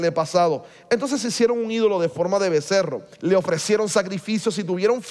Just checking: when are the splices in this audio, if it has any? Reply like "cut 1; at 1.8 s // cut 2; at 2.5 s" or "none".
cut 1; at 3.1 s